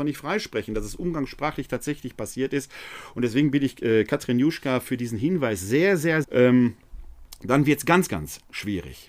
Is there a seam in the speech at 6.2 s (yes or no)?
yes